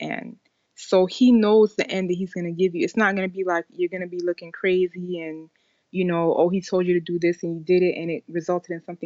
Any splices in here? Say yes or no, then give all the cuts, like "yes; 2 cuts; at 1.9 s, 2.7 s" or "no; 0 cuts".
no; 0 cuts